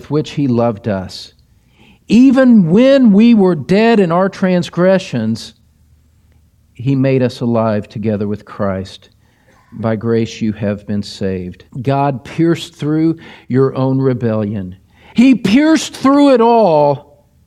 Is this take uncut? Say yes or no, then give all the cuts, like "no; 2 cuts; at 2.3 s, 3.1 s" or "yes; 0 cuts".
no; 2 cuts; at 11.7 s, 15.1 s